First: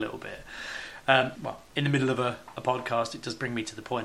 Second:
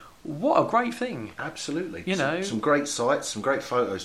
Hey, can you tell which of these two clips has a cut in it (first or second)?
first